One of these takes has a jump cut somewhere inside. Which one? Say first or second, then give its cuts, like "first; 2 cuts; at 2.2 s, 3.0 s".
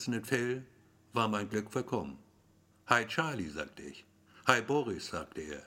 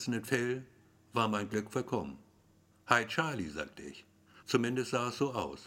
second; 1 cut; at 4.4 s